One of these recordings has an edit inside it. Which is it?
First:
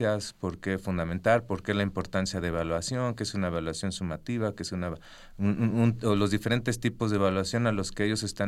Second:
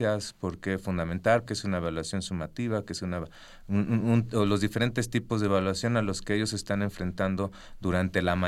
second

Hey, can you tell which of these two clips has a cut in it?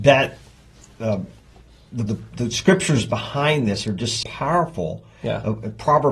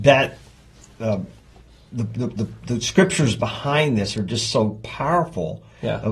first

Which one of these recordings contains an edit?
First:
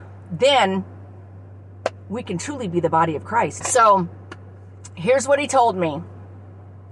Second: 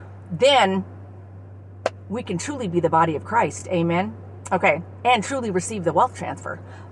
first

